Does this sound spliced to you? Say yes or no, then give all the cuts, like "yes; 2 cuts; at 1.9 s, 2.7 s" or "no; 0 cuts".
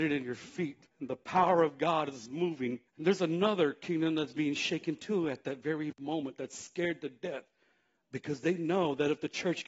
yes; 2 cuts; at 0.9 s, 2.9 s